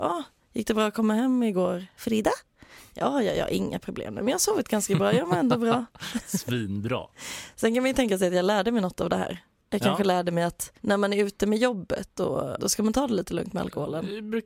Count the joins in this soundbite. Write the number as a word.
two